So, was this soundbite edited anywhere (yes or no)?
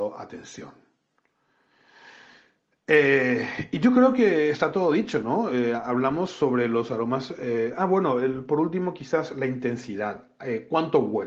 no